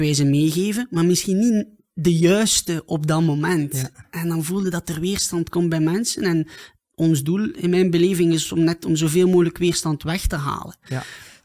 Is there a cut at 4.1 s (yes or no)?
no